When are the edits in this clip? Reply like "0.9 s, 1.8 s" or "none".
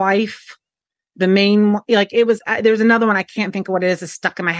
2.4 s